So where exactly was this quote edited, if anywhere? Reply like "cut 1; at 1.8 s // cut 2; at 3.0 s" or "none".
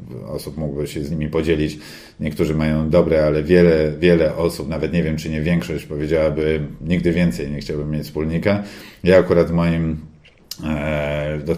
none